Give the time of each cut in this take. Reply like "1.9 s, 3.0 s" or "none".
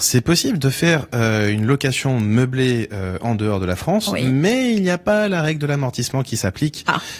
none